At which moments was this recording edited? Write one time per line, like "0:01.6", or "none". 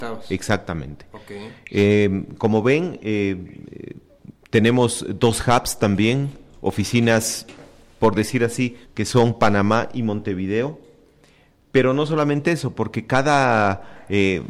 0:08.8